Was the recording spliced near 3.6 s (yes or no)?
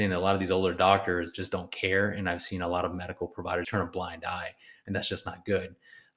yes